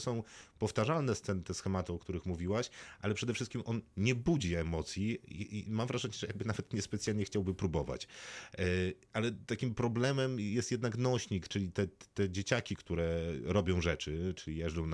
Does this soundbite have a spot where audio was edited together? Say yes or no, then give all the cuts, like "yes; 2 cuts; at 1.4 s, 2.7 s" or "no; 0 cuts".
no; 0 cuts